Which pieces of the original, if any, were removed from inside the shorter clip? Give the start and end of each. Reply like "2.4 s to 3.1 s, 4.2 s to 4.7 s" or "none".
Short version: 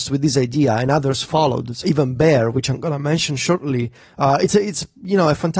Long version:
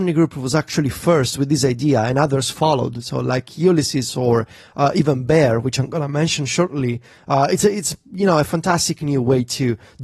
3.1 s to 4.9 s